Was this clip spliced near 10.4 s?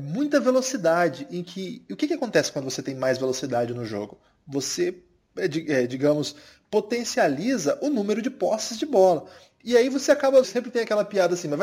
yes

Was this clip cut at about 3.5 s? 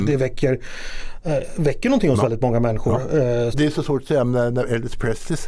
yes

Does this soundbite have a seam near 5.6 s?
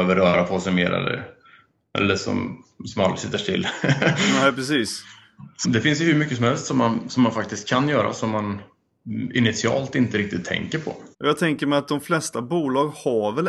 yes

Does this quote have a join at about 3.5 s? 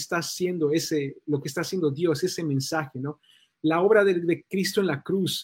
no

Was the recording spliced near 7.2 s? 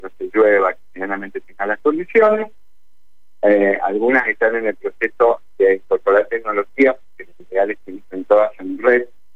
no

